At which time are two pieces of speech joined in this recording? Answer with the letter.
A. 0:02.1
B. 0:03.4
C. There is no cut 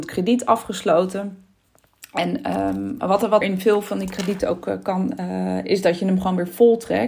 B